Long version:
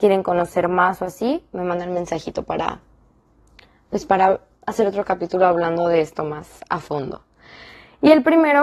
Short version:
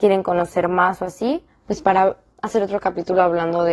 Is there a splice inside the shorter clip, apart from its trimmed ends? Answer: yes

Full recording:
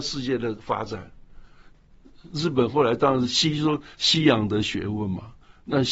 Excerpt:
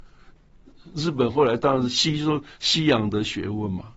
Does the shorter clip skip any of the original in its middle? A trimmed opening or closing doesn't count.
no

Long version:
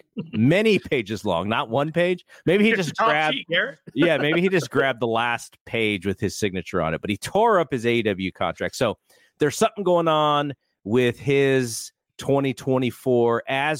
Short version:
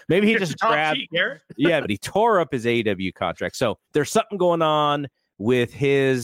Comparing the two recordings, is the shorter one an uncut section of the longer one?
no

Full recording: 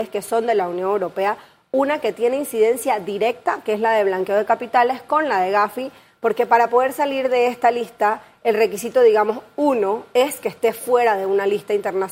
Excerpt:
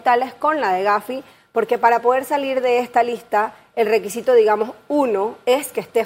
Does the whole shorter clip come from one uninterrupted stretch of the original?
yes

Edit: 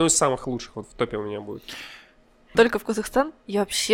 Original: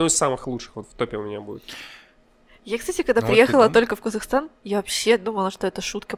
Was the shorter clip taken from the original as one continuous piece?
no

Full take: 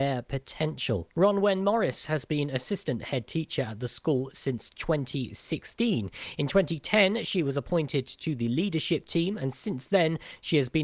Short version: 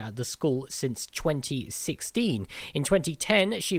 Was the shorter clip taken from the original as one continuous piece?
yes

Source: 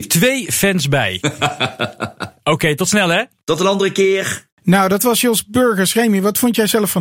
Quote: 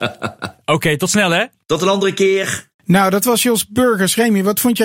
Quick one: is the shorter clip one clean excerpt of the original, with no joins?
yes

